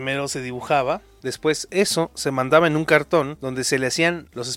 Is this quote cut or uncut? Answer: cut